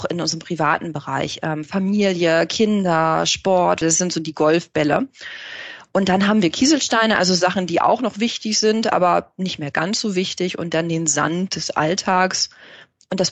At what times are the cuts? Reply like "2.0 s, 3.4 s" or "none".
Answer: 3.8 s

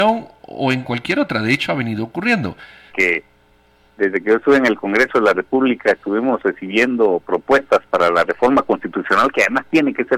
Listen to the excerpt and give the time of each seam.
2.9 s

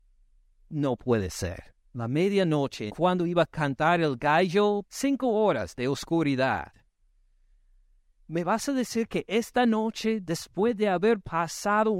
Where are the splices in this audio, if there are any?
1.9 s, 2.9 s, 4.8 s

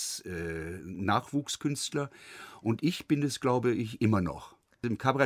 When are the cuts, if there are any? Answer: none

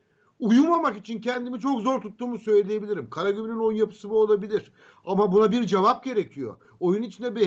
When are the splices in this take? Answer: none

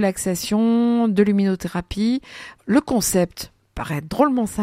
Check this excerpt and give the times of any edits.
2.6 s

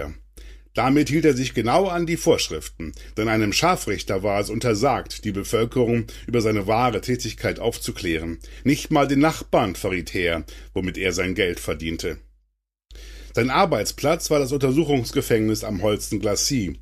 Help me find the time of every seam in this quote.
none

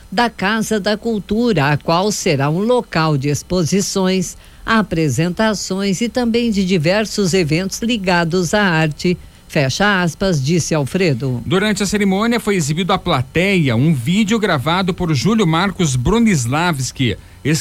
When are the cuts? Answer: none

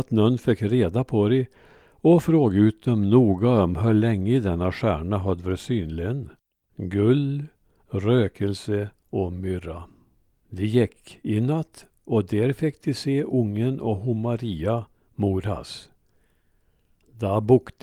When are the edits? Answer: 6.7 s, 10.3 s

